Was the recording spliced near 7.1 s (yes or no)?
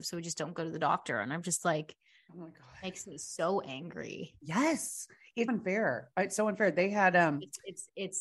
no